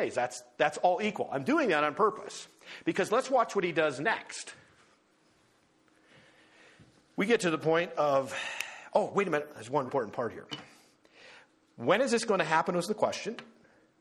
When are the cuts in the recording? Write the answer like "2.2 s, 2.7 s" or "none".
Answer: 9.9 s